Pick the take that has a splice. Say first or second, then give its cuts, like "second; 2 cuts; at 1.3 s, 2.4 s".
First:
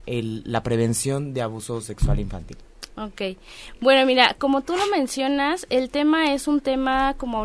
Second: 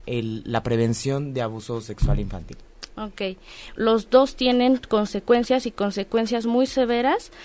second; 1 cut; at 3.8 s